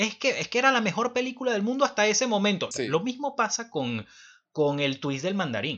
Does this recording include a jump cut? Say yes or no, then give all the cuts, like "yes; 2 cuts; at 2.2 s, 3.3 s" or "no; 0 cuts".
yes; 1 cut; at 2.7 s